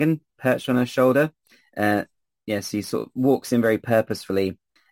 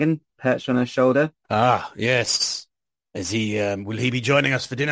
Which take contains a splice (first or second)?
second